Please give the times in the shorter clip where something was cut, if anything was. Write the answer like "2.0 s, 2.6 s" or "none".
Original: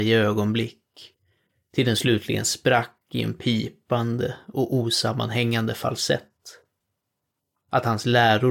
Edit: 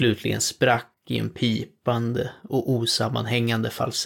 none